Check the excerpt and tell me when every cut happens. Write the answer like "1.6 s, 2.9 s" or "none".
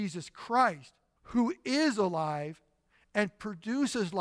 1.2 s